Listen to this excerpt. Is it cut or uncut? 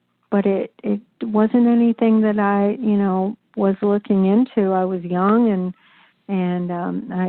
uncut